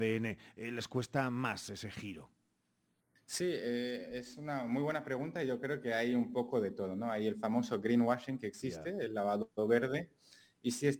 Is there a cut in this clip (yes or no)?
no